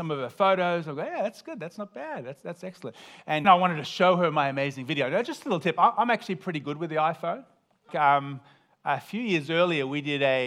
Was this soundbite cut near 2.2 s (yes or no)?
no